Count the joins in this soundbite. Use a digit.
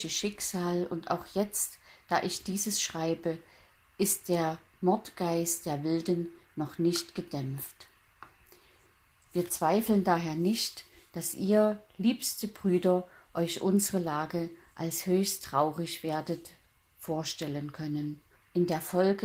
1